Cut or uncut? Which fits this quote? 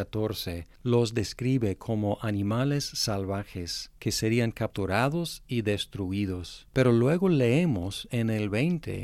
uncut